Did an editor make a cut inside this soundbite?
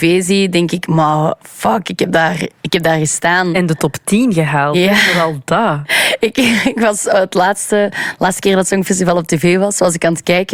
no; 0 cuts

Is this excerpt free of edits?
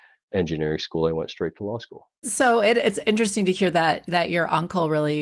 no; 1 cut; at 2.2 s

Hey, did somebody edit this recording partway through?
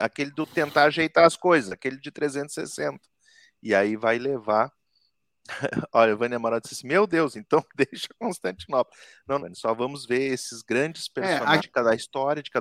yes; 2 cuts; at 9.4 s, 11.6 s

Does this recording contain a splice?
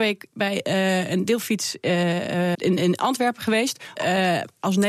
yes; 2 cuts; at 2.5 s, 4.0 s

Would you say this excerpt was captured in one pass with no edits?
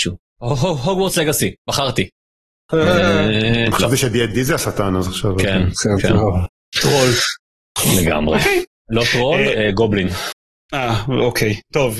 no; 1 cut; at 1.7 s

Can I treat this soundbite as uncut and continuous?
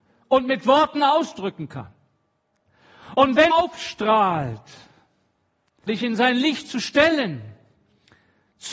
no; 2 cuts; at 3.5 s, 5.9 s

